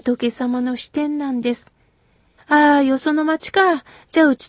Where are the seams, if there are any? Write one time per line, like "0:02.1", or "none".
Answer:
0:02.4